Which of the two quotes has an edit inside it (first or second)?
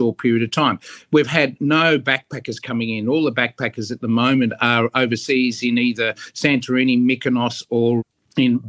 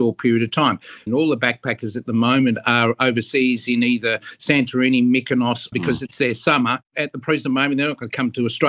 second